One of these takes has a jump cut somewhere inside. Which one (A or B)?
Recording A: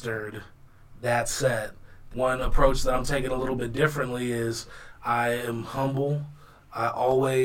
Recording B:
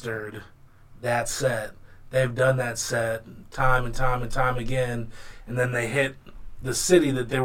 A